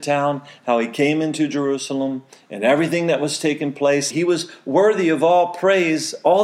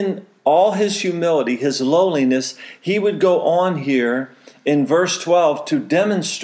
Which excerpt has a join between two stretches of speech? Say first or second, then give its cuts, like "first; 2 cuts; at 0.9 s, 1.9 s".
first; 1 cut; at 4.1 s